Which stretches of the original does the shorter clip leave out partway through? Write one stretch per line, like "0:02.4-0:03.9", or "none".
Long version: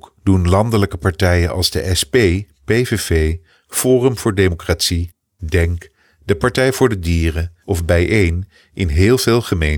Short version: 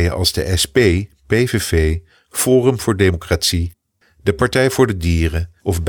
0:05.4-0:06.0

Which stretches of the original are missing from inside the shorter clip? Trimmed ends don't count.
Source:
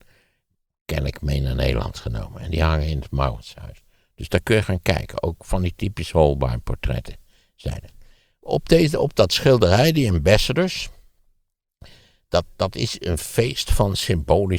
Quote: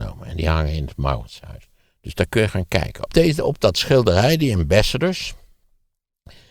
0:05.2-0:08.6

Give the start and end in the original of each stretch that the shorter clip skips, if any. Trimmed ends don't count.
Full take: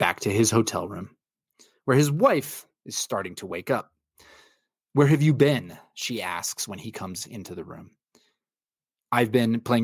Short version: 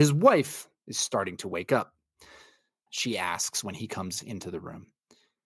0:04.8-0:05.9

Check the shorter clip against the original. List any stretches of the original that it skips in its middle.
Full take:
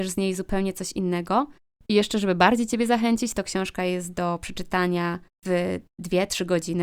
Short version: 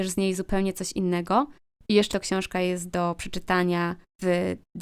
0:02.1-0:03.3

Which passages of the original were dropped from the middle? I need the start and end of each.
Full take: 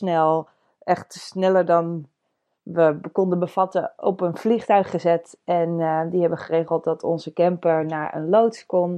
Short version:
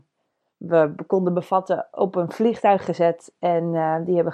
none

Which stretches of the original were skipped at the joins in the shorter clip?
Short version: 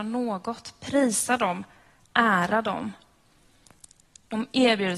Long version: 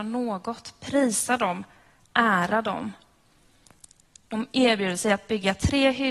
none

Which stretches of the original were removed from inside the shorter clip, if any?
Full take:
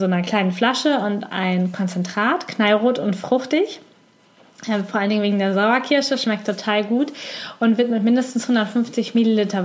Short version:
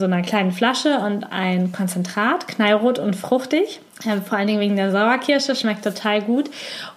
0:03.9-0:04.5

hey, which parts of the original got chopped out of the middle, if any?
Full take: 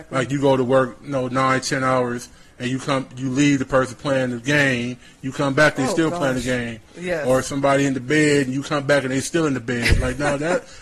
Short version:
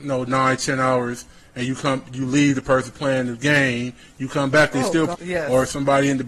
0:06.2-0:06.9

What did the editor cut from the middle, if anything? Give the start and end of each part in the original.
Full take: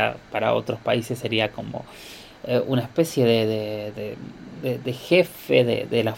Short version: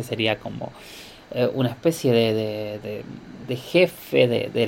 0:04.6-0:04.8

